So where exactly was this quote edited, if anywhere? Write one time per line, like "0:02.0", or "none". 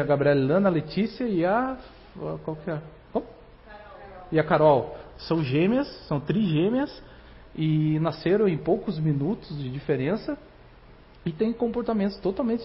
none